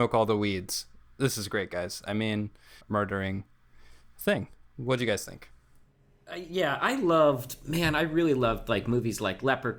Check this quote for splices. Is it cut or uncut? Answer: cut